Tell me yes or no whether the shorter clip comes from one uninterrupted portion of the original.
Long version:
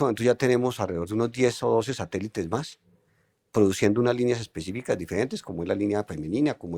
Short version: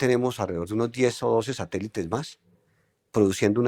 yes